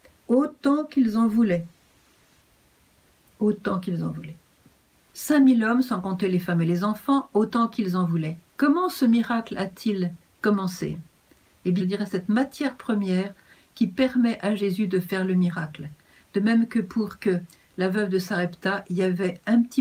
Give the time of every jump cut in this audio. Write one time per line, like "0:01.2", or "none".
0:08.5
0:11.8